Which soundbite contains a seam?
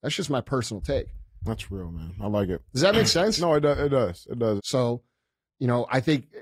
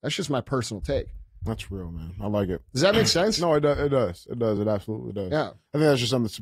first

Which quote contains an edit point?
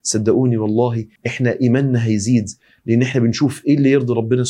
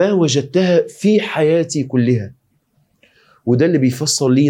first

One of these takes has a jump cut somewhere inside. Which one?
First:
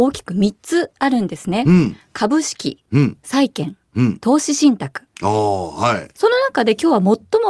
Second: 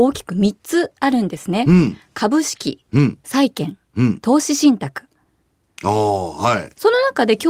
first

